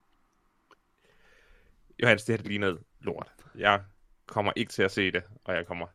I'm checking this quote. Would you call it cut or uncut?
uncut